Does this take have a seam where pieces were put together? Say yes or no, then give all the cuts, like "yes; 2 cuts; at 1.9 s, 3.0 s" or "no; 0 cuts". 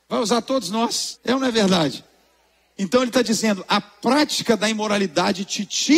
yes; 1 cut; at 1.2 s